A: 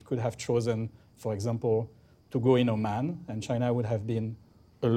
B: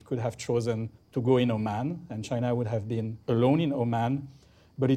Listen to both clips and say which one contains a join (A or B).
B